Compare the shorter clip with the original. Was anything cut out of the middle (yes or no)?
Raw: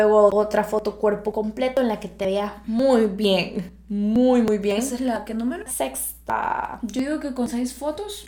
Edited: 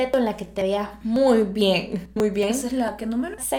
yes